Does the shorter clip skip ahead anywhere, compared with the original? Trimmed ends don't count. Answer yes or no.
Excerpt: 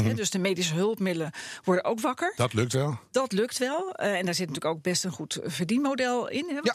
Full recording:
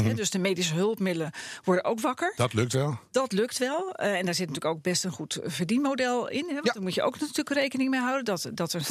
no